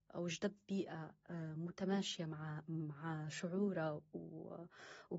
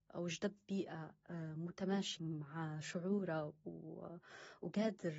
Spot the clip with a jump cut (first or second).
second